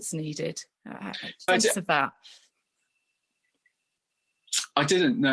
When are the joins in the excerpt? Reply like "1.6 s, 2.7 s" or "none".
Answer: 1.5 s